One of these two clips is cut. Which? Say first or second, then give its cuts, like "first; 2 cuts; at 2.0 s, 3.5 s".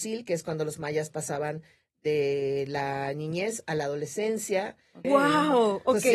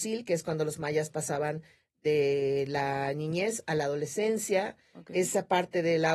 first; 1 cut; at 5.0 s